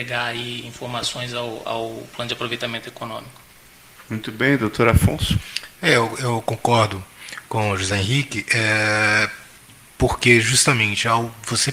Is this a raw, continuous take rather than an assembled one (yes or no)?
yes